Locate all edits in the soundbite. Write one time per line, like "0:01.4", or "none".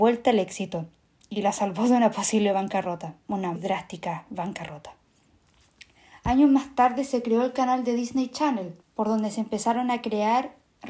0:03.6
0:08.8